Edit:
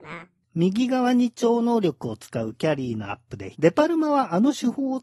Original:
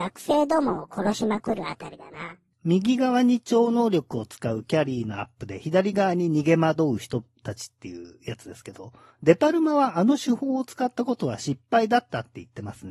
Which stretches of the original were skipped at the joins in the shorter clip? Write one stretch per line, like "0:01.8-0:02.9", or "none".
0:05.6-0:09.2